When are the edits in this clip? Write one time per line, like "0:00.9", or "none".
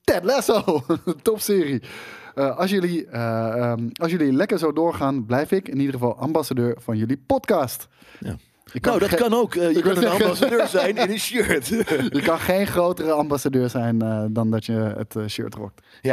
none